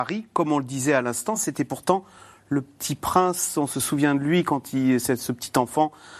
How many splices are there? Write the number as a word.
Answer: zero